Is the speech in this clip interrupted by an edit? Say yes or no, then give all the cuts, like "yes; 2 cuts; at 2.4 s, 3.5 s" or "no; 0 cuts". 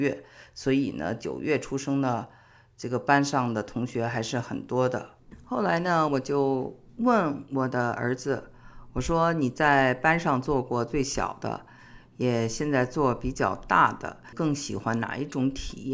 no; 0 cuts